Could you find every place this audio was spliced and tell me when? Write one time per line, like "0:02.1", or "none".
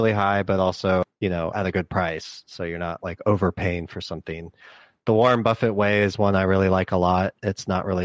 none